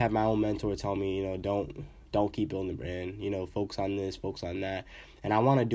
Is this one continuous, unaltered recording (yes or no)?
yes